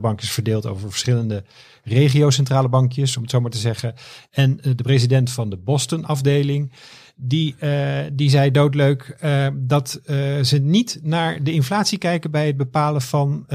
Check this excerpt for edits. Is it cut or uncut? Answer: uncut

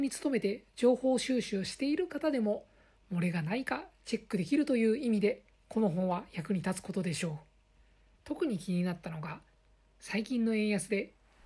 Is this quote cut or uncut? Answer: cut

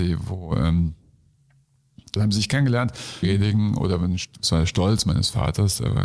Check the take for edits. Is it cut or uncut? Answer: cut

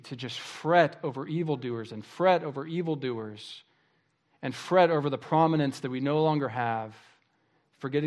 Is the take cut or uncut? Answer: uncut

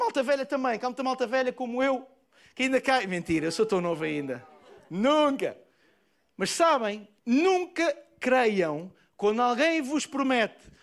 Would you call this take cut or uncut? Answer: cut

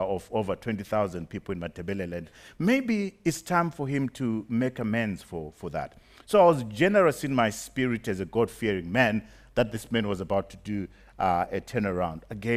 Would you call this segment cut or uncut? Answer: uncut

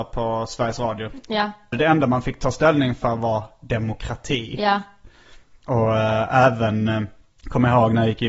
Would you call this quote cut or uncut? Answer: uncut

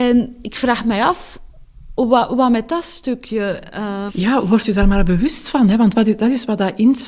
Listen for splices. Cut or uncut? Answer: cut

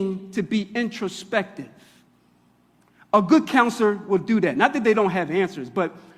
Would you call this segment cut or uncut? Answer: uncut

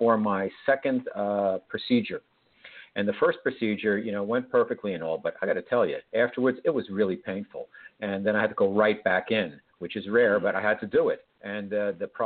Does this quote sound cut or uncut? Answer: uncut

